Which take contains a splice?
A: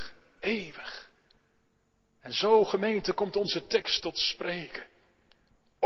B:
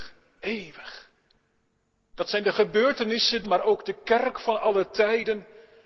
B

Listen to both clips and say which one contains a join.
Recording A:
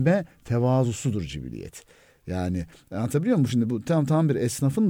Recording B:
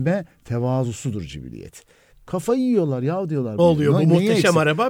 B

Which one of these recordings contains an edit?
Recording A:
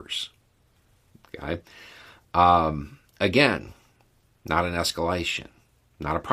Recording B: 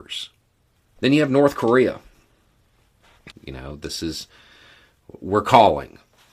B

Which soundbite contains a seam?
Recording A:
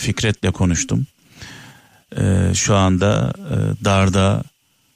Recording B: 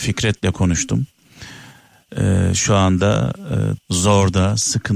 B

